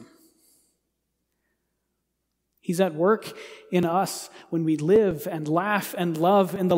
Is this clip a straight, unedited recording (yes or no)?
yes